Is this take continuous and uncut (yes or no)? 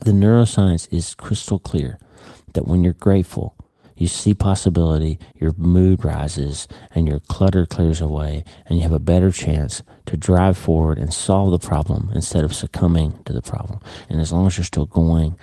no